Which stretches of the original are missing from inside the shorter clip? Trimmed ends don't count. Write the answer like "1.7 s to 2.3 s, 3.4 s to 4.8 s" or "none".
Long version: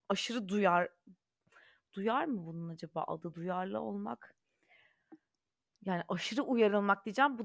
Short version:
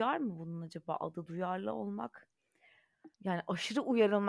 5.2 s to 5.7 s